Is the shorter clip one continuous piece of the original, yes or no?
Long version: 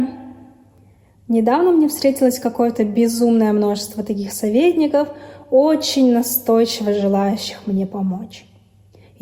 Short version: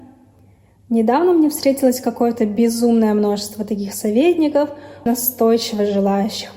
no